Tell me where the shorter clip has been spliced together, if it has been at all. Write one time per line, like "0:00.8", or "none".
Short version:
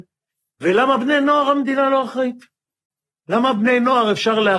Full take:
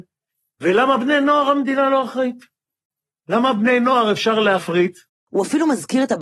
none